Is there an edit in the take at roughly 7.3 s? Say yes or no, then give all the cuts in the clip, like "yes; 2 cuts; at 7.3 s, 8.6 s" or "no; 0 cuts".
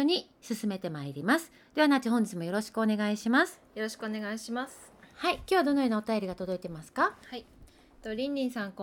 no; 0 cuts